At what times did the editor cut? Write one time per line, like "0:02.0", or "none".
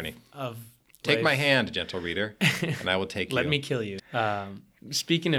0:04.0